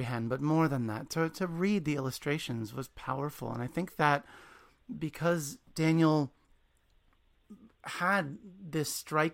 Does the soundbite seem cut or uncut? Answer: uncut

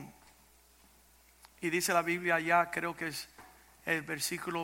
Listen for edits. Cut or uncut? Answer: uncut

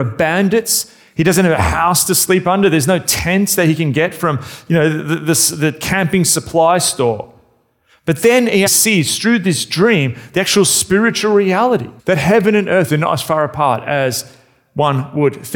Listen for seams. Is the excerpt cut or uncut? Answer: cut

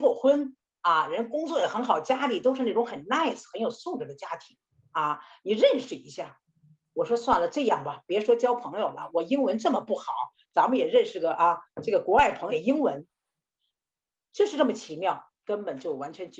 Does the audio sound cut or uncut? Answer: cut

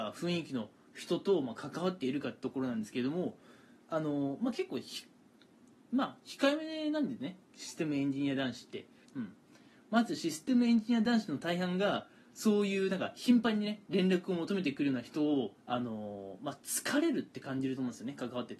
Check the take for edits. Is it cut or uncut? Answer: cut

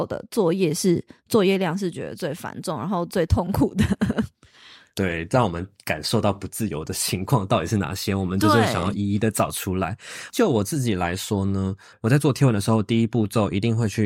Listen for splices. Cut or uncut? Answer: uncut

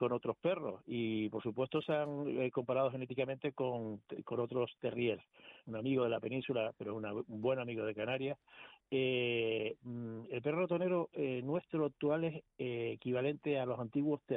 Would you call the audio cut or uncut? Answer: cut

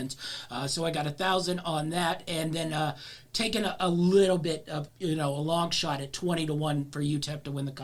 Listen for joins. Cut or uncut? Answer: cut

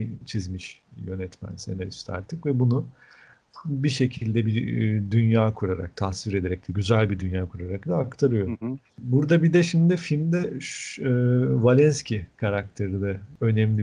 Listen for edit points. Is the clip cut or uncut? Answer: uncut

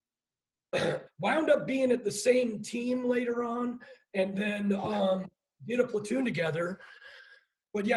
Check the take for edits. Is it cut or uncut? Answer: cut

